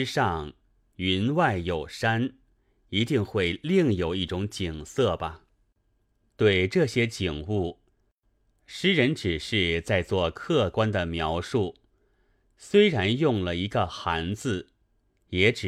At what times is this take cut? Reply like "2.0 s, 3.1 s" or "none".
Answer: none